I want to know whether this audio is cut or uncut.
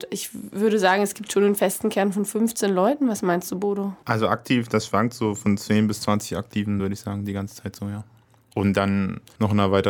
uncut